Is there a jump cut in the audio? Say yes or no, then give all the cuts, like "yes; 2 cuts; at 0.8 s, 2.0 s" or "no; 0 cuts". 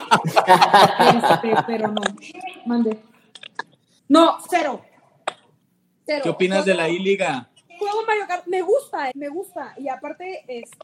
yes; 2 cuts; at 4.0 s, 9.1 s